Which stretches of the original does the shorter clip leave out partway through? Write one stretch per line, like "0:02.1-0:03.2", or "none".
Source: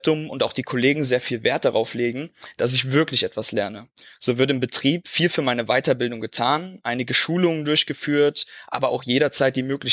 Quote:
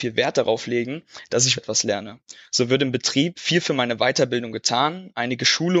0:02.9-0:03.3